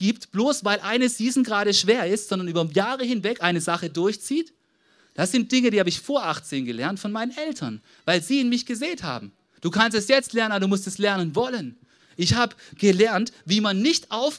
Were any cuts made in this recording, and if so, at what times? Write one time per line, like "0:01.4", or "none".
0:09.6
0:12.0